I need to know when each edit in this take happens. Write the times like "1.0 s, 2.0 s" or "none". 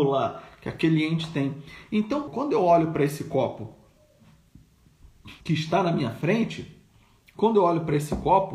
2.3 s, 5.4 s